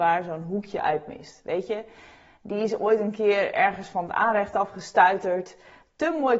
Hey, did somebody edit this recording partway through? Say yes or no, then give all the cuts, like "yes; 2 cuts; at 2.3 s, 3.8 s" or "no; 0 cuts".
no; 0 cuts